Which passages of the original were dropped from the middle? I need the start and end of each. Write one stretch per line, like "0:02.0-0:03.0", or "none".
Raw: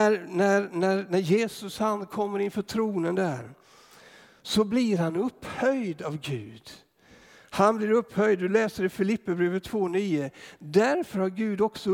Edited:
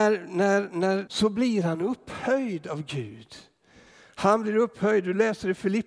0:01.1-0:04.4